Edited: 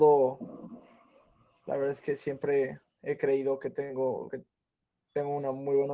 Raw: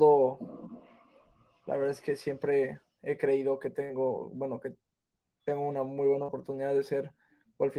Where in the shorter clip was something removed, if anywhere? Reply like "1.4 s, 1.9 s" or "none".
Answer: 4.3 s